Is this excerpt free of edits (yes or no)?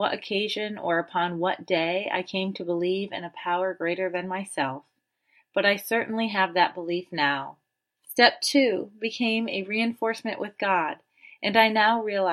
no